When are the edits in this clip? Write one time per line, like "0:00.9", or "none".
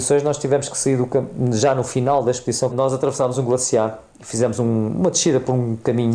0:02.7